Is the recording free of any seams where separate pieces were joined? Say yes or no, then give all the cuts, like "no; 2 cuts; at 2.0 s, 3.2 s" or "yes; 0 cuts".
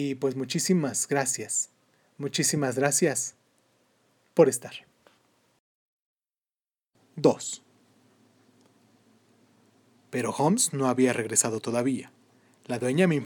no; 1 cut; at 9.9 s